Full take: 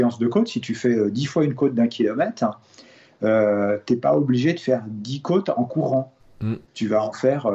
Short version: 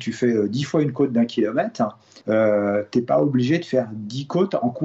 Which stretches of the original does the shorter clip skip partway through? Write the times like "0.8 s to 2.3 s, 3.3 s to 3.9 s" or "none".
2.8 s to 3.2 s